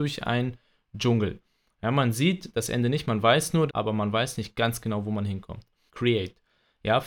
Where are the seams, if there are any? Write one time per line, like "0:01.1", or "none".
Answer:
0:03.7
0:05.9